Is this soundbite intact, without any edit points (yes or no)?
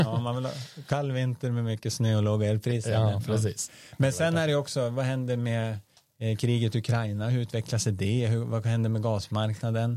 yes